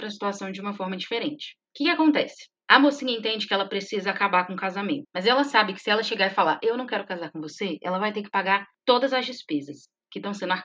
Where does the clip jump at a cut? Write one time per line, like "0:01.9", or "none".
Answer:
0:05.0